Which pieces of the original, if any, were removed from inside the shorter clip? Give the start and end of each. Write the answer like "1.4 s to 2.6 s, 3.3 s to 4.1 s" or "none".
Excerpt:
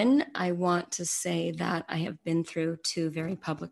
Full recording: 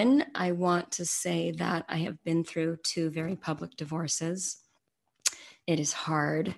none